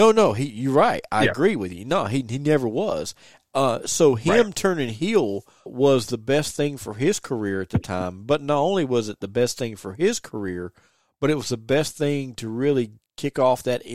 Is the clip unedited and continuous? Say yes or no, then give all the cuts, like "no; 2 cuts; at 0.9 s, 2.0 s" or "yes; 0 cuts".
no; 1 cut; at 5.7 s